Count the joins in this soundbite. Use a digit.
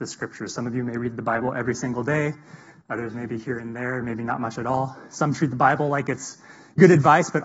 0